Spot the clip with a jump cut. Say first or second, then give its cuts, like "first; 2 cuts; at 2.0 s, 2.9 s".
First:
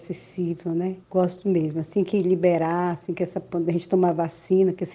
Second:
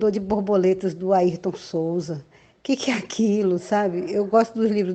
first; 1 cut; at 1.0 s